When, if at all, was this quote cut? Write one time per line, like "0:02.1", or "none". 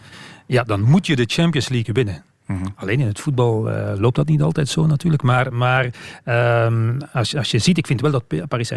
none